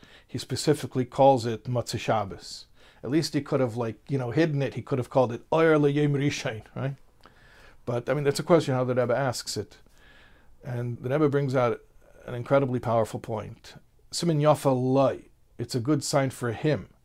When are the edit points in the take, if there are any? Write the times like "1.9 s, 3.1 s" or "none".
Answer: 11.0 s, 13.9 s